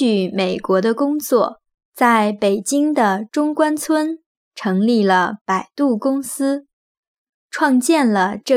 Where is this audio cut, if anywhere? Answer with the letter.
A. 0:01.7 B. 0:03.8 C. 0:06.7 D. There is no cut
A